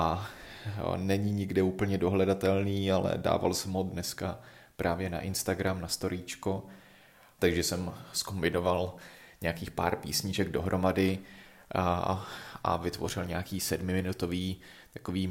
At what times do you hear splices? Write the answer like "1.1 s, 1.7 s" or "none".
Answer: 7.4 s